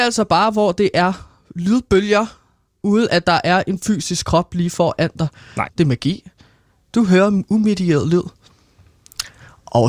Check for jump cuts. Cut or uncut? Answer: cut